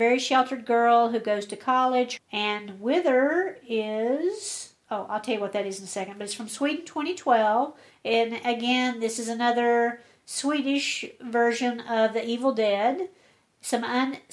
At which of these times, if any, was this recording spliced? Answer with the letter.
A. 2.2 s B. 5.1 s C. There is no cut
A